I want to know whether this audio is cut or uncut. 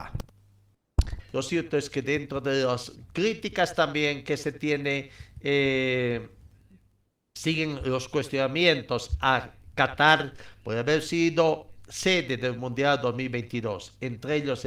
cut